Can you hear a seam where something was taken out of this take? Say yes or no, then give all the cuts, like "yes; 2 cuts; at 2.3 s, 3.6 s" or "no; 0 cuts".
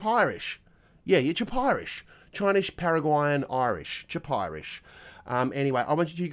no; 0 cuts